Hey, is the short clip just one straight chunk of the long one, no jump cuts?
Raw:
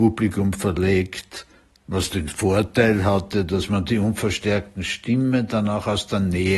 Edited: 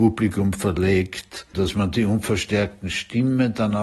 no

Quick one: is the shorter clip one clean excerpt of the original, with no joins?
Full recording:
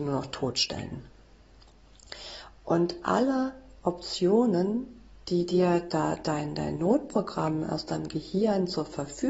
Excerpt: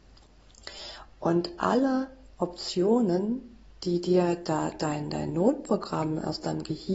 yes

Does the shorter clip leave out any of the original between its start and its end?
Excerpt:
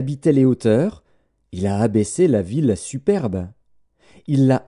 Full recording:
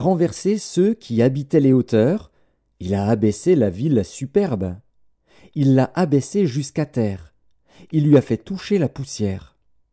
no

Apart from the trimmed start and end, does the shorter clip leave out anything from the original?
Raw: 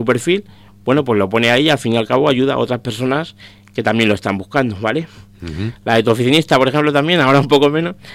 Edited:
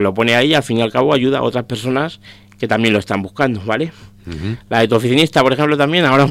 no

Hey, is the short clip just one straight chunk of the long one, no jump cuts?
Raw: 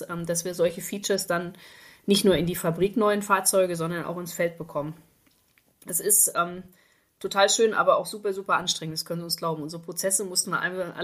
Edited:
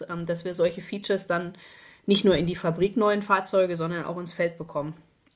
yes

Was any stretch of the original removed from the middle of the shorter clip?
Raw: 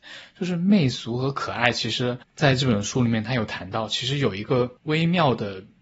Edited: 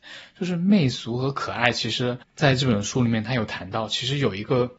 no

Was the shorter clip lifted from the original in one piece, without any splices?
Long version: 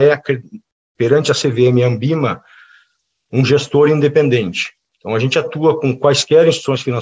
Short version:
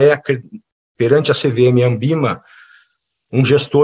yes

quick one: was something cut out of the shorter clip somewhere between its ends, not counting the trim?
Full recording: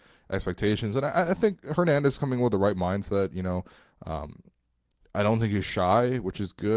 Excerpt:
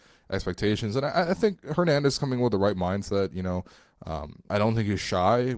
yes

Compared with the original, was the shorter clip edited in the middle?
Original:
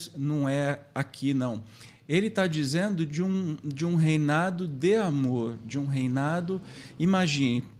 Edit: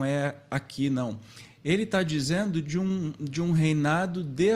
no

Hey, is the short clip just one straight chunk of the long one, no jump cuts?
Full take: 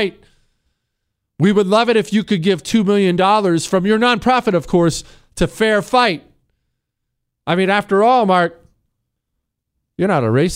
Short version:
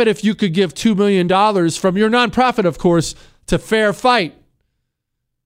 yes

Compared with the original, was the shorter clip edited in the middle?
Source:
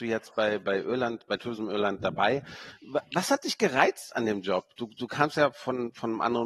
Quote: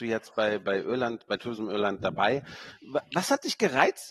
no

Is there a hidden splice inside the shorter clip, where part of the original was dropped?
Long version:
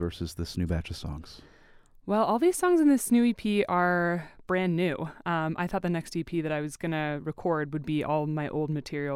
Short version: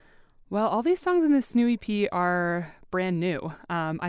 no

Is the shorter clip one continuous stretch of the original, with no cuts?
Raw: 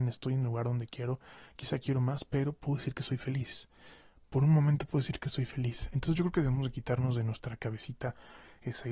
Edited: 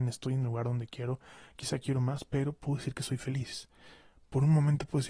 yes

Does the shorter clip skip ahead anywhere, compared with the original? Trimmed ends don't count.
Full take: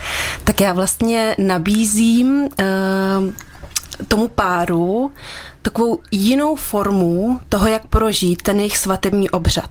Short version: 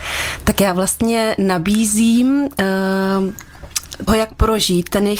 yes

